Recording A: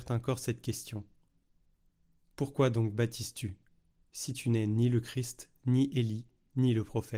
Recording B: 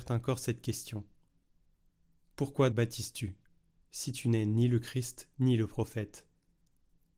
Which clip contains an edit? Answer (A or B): B